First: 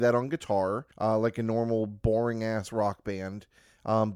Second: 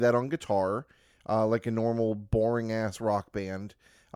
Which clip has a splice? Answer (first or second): first